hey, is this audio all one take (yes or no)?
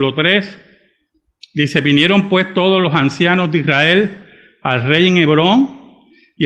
yes